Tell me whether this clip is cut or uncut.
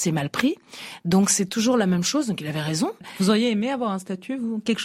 uncut